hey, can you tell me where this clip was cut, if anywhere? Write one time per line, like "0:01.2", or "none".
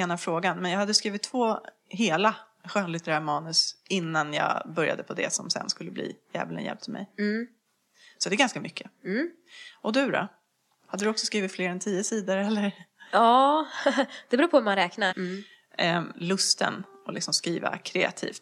0:15.1
0:16.1